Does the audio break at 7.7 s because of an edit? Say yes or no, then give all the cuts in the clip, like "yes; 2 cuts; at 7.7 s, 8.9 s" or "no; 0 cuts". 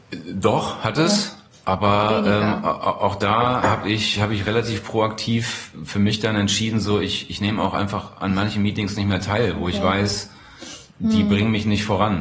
no; 0 cuts